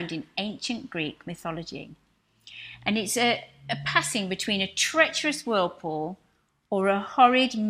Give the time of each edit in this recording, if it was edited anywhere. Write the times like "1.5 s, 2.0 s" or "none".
none